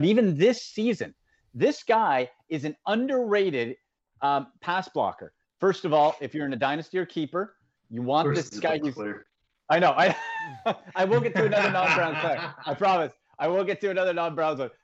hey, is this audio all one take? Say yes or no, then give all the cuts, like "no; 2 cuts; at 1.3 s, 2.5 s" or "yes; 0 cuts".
no; 1 cut; at 5.4 s